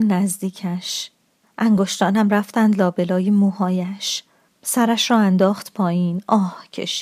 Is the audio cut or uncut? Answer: cut